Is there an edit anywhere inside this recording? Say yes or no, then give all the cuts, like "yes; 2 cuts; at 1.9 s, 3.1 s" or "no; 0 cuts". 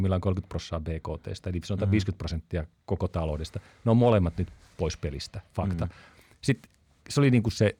no; 0 cuts